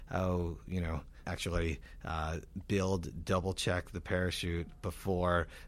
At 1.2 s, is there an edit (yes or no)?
yes